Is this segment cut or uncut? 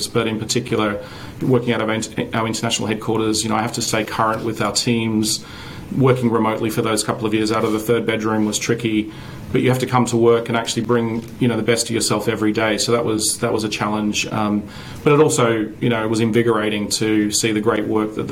uncut